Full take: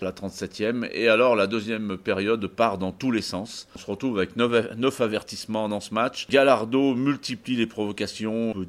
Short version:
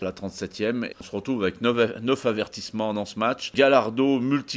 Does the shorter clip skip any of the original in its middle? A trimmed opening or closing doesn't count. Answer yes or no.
yes